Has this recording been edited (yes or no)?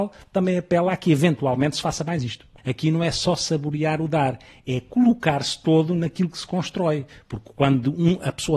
yes